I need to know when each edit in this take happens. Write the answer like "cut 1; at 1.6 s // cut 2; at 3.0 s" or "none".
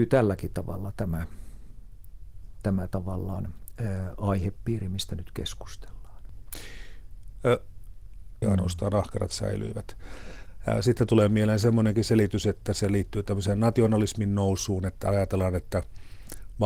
cut 1; at 8.4 s